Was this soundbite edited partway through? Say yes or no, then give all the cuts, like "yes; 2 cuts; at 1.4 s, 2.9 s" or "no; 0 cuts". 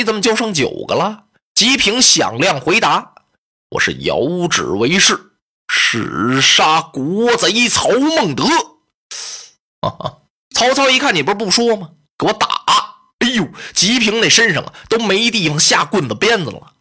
yes; 1 cut; at 10.4 s